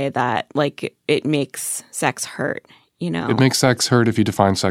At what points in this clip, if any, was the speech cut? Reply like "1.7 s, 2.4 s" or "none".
none